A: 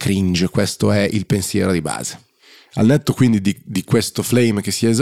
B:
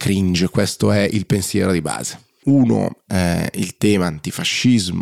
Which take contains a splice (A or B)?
B